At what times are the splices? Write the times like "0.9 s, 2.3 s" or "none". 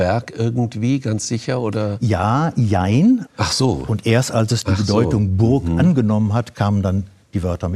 3.3 s

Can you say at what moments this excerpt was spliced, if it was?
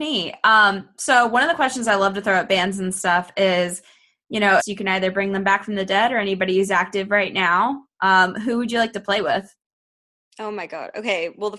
4.6 s

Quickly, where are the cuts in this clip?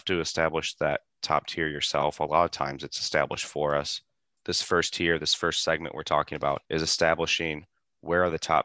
4.4 s, 6.6 s

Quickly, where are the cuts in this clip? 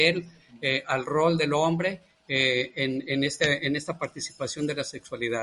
none

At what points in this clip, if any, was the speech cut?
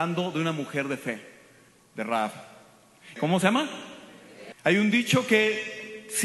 3.2 s, 4.5 s

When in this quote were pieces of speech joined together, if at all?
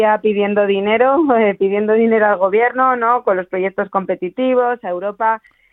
none

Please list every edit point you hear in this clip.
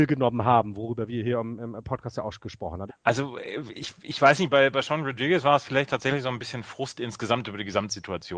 2.9 s

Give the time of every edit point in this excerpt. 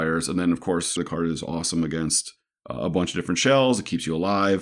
1.0 s

